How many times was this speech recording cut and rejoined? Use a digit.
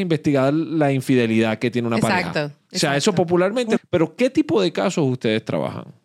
1